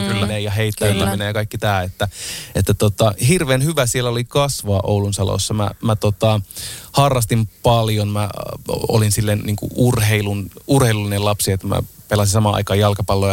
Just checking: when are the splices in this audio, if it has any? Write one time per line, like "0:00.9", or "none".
none